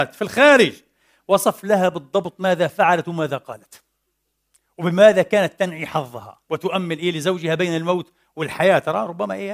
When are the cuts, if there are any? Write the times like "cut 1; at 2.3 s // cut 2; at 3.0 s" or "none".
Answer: cut 1; at 6.4 s